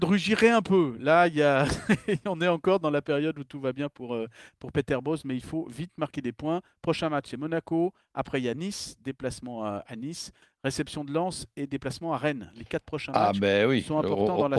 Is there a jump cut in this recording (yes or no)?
no